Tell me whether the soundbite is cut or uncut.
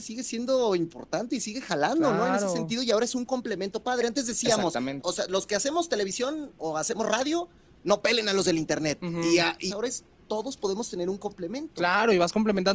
cut